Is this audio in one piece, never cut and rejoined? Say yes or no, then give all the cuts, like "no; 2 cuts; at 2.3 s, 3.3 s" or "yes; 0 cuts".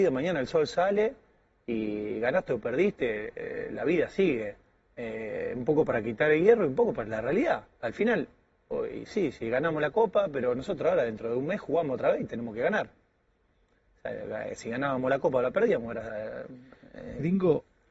yes; 0 cuts